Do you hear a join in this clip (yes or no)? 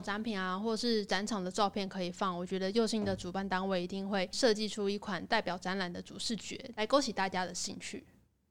no